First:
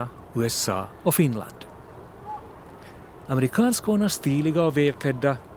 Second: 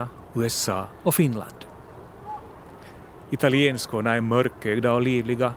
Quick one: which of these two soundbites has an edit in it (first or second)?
first